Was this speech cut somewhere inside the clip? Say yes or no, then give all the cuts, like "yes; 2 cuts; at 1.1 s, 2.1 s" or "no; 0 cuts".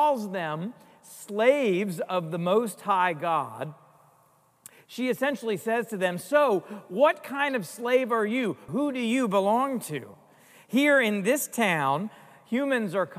yes; 1 cut; at 8.7 s